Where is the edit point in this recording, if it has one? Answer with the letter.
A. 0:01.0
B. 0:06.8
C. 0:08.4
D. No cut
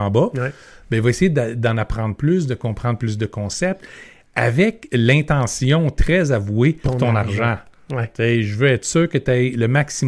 B